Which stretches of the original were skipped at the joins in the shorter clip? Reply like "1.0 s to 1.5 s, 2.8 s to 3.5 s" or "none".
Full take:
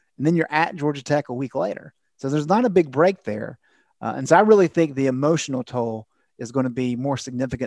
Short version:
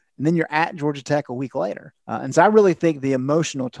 2.0 s to 3.9 s